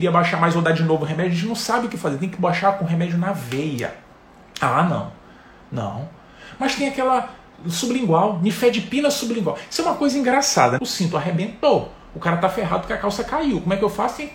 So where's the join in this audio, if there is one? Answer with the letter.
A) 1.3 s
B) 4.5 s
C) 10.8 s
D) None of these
C